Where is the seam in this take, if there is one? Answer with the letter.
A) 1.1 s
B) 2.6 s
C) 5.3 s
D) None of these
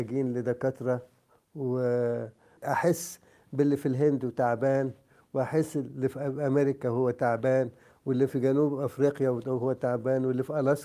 B